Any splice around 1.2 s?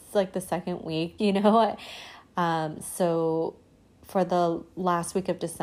yes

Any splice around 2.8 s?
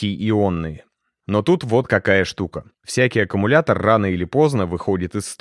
yes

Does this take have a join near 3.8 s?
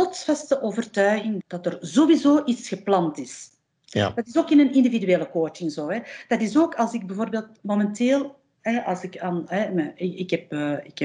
no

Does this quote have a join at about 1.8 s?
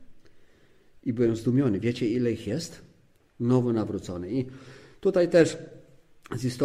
no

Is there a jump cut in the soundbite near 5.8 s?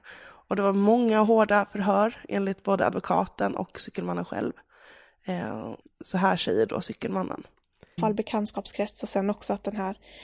yes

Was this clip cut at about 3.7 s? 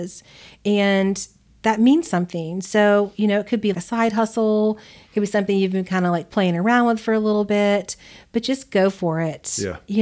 yes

